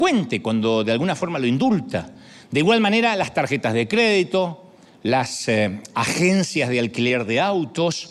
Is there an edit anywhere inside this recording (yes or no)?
no